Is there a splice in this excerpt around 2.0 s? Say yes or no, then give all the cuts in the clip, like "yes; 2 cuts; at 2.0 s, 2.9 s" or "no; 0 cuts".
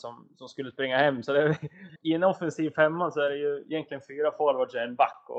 yes; 1 cut; at 2.0 s